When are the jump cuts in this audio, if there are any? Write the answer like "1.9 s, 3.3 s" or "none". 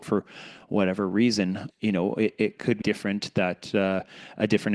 1.7 s, 2.8 s